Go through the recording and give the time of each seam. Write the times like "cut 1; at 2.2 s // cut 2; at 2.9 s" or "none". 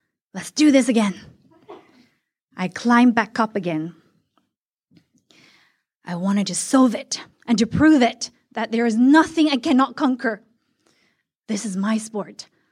cut 1; at 7.3 s